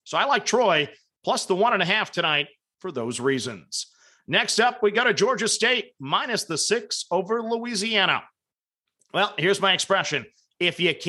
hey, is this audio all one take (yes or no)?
yes